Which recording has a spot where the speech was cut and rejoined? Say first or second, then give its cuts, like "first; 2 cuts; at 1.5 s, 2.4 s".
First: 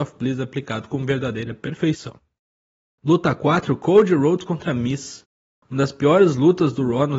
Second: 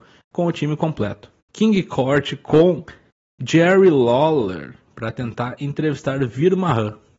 second; 1 cut; at 1.4 s